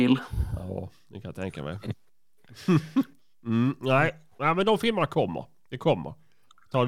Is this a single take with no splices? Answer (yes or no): yes